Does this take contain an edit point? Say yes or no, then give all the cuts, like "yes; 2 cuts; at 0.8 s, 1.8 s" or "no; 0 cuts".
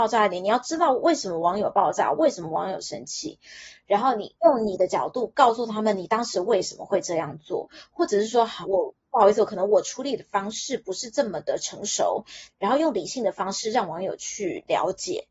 yes; 2 cuts; at 8.6 s, 12.5 s